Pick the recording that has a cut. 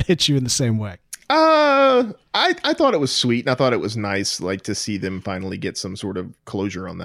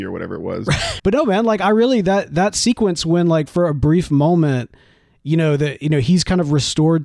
second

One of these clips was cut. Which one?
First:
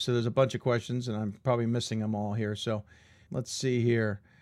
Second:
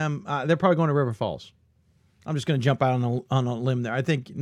first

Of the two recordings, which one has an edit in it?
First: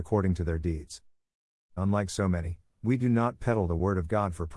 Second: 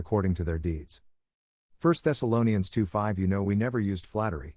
first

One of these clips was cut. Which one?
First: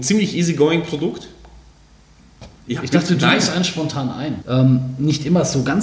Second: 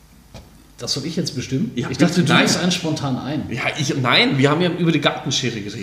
first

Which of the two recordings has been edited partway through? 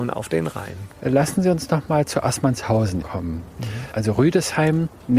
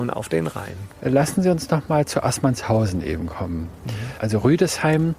first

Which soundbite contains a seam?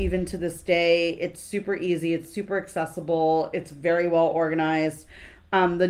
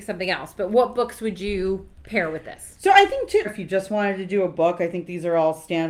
second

